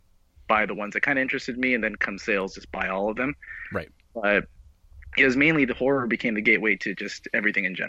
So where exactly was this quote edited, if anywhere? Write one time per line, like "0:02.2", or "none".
none